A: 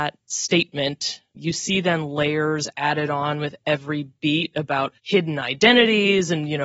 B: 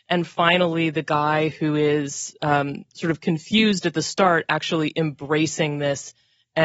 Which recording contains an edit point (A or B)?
A